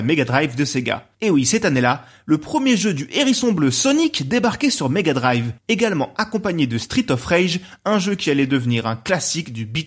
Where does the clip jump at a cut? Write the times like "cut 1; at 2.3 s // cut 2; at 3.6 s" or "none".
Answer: cut 1; at 1.1 s